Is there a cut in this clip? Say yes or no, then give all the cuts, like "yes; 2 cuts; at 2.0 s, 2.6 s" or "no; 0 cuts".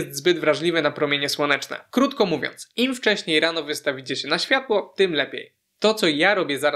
no; 0 cuts